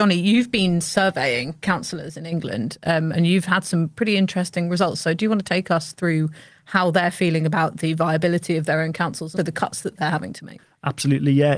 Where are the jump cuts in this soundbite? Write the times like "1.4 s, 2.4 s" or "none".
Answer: 9.4 s